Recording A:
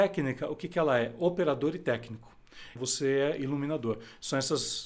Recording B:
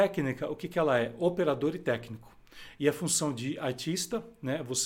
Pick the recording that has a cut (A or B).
A